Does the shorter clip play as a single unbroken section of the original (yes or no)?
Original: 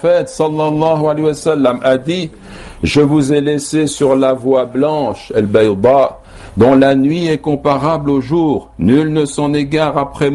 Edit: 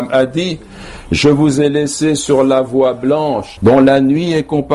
no